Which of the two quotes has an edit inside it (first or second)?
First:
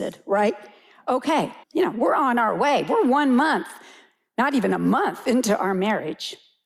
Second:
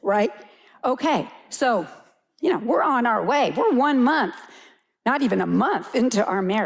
first